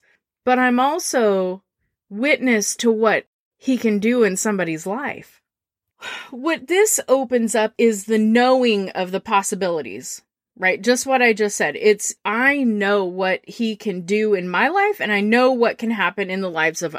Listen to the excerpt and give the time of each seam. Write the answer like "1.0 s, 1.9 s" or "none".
none